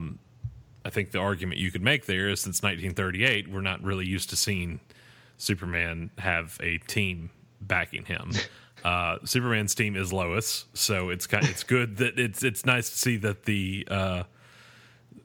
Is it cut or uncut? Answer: uncut